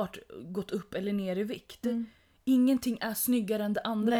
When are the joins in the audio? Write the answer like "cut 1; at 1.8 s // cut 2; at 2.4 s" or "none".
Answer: none

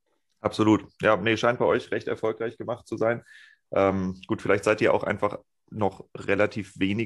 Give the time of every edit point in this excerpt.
none

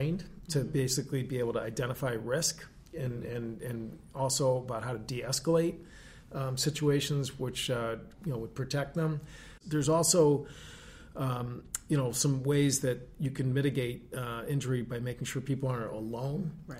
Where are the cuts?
cut 1; at 9.6 s

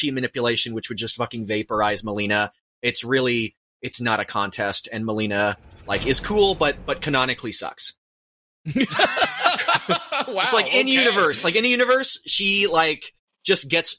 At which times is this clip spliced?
none

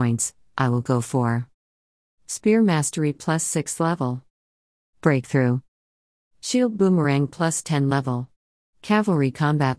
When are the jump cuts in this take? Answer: cut 1; at 8.6 s

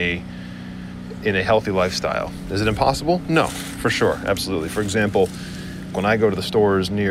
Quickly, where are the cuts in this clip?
cut 1; at 3.7 s // cut 2; at 5.9 s

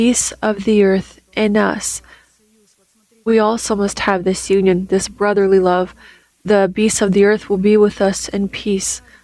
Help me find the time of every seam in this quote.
none

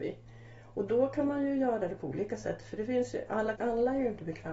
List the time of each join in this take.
cut 1; at 3.5 s

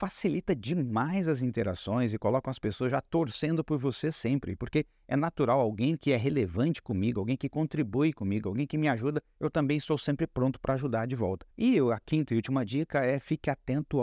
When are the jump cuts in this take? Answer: cut 1; at 11.5 s

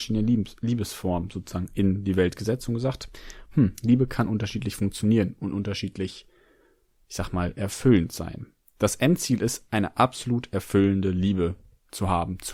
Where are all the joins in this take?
none

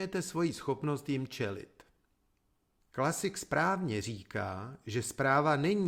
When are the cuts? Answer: cut 1; at 2.8 s

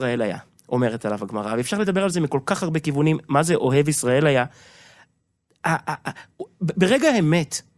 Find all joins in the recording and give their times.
none

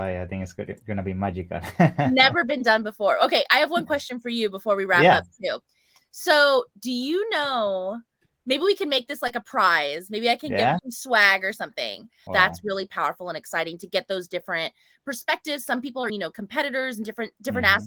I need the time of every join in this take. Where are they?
cut 1; at 10.8 s // cut 2; at 12.3 s // cut 3; at 16.1 s

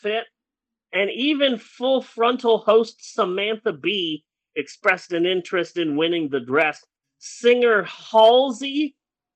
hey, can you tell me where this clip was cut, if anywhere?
cut 1; at 7.0 s

